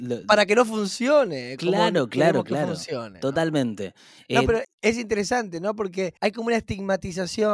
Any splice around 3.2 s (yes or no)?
no